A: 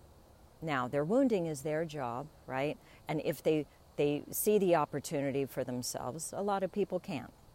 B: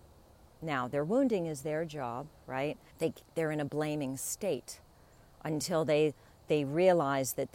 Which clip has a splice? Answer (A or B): B